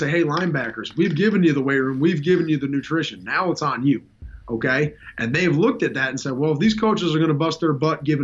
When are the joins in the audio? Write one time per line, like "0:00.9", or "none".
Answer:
none

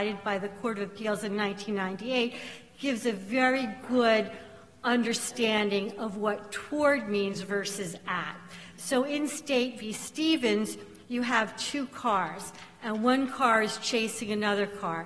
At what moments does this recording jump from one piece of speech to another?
none

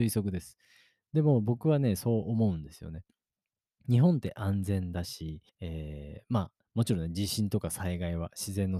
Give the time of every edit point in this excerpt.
0:05.5

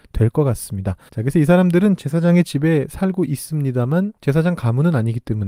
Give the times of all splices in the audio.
0:01.1
0:04.2

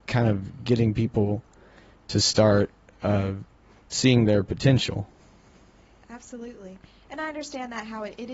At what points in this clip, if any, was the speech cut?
none

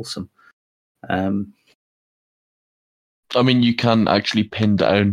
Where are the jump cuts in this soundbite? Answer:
none

